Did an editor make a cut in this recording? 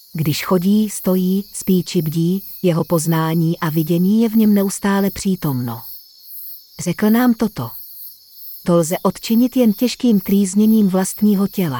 yes; 1 cut; at 8.6 s

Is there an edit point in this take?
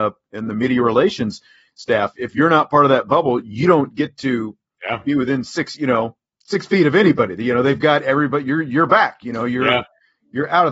no; 0 cuts

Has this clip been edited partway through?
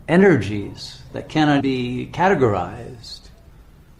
yes; 1 cut; at 1.6 s

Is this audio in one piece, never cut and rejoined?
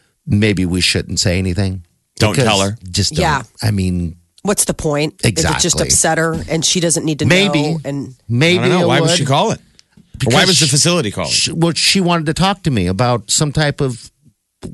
yes; 0 cuts

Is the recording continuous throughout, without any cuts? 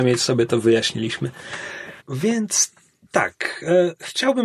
no; 1 cut; at 2.0 s

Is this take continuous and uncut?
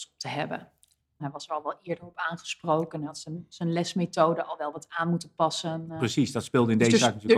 no; 1 cut; at 1.2 s

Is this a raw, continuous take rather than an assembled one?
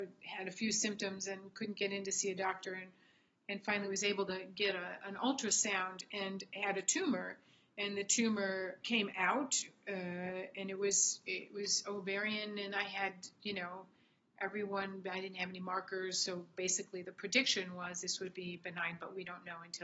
no; 1 cut; at 8.8 s

